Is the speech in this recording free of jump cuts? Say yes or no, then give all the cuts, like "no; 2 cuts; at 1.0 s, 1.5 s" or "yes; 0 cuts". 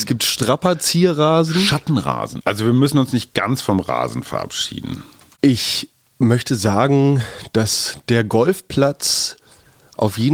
no; 2 cuts; at 2.4 s, 5.3 s